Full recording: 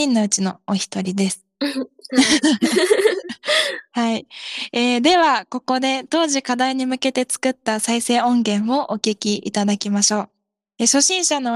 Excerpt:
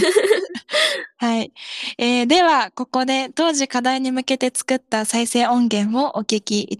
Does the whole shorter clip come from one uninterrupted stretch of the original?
yes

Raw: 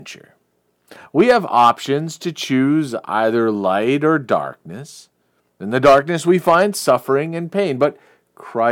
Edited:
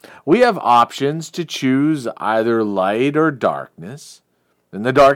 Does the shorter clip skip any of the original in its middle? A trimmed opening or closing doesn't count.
no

